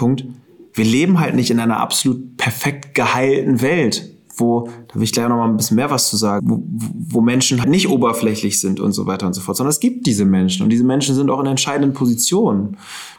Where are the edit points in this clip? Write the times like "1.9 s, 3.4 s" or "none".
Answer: 6.4 s, 7.6 s